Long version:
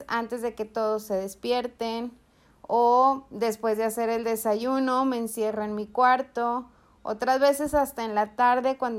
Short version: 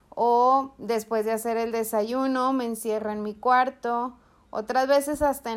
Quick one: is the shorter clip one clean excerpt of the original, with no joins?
yes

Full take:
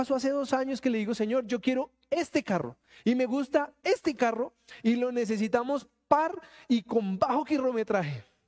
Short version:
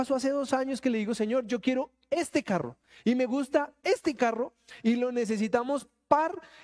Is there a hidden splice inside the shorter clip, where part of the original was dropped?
no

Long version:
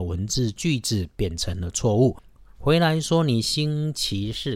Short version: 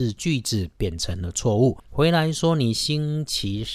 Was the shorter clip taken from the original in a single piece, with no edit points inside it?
no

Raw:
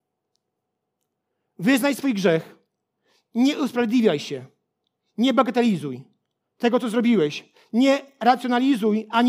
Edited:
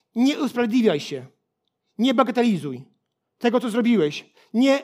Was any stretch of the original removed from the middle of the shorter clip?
no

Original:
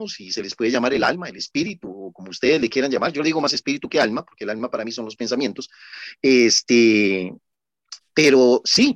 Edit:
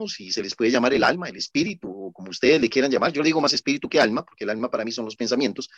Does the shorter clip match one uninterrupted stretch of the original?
yes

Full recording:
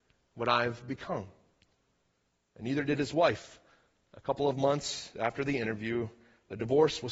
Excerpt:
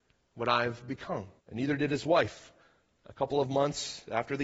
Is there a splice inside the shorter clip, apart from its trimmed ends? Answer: yes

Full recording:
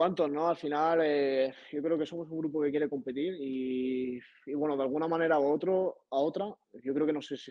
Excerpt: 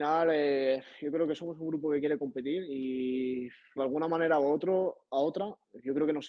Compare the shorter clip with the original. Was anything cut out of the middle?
yes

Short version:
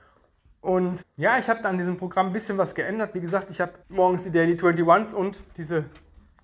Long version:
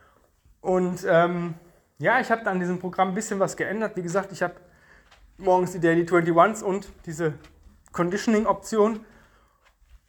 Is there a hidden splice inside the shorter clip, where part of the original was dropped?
yes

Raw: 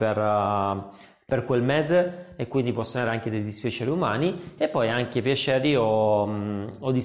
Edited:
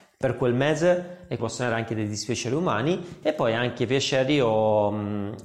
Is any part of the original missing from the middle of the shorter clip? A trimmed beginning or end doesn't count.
yes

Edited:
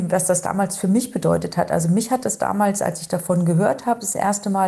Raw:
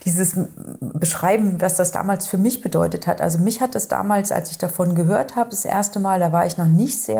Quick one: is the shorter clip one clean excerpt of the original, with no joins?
yes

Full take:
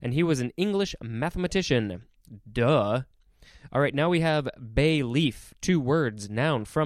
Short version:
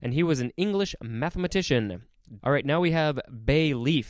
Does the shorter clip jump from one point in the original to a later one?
yes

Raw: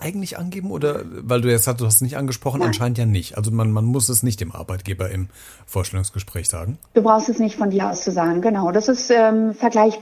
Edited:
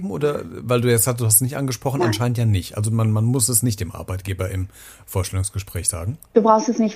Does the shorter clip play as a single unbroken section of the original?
yes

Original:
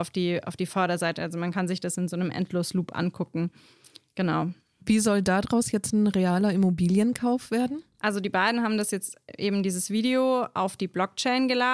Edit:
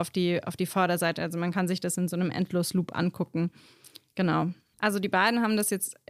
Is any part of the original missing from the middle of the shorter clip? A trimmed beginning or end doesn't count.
yes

